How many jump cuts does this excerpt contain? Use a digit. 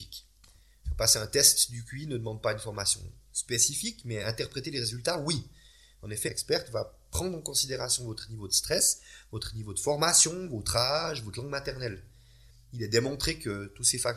1